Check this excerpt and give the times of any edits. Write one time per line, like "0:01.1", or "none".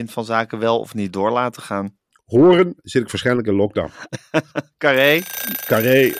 none

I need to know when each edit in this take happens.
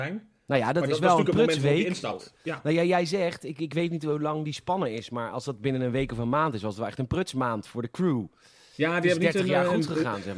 none

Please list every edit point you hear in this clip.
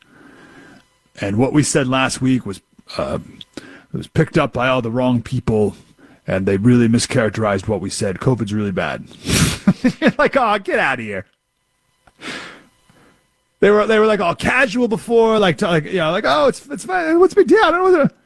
none

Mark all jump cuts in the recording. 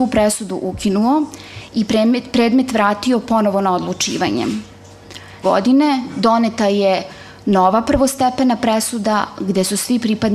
0:05.4

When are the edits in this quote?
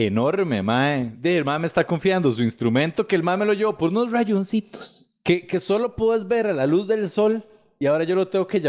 none

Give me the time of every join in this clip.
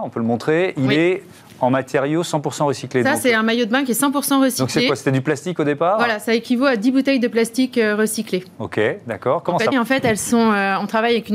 0:09.7

